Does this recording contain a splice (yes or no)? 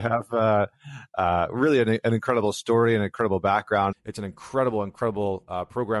yes